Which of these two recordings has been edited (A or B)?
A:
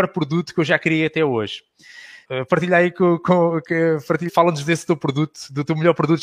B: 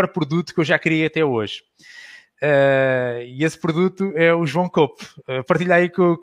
A